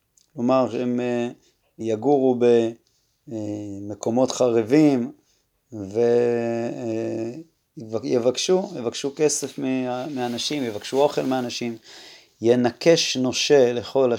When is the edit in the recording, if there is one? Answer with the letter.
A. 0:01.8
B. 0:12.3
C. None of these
A